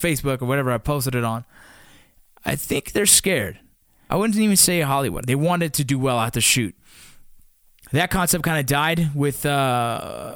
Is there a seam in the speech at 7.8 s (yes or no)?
yes